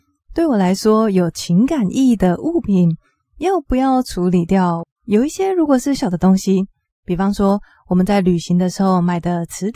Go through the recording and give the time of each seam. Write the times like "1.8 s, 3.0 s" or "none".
4.8 s, 6.0 s